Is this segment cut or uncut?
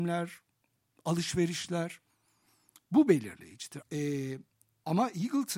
cut